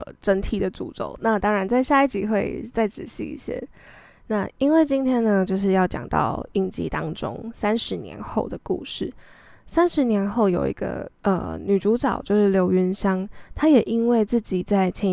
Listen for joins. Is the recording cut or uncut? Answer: uncut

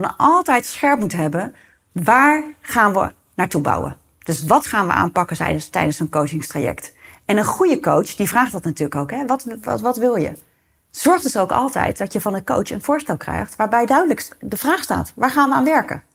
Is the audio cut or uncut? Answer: uncut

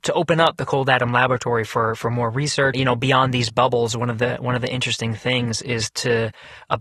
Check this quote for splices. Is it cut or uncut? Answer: cut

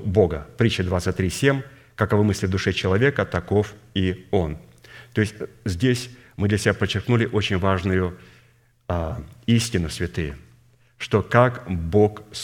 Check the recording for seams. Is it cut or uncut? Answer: uncut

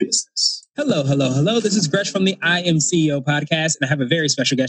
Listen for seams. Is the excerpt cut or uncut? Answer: uncut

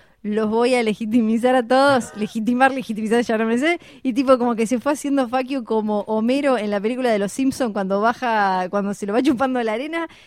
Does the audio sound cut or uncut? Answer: uncut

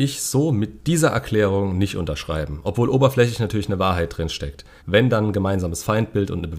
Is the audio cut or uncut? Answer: cut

